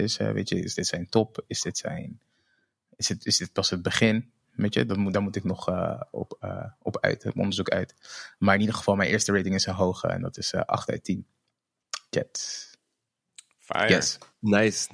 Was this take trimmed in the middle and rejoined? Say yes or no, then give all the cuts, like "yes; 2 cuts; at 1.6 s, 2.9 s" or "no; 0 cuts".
no; 0 cuts